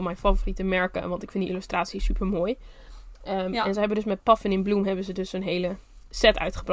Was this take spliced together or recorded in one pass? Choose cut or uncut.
uncut